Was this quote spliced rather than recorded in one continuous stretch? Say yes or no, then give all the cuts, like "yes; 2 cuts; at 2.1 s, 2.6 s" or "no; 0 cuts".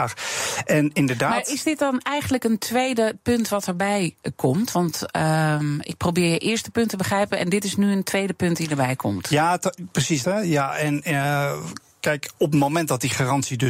yes; 1 cut; at 10.2 s